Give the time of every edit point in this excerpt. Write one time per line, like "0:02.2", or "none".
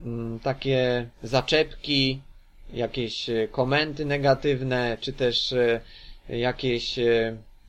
0:01.1